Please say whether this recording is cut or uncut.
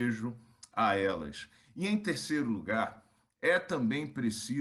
uncut